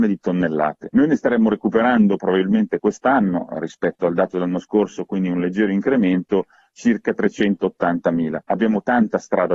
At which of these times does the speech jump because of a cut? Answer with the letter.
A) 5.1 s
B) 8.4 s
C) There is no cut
B